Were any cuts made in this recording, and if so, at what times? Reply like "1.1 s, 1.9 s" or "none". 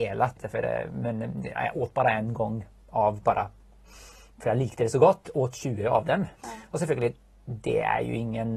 6.3 s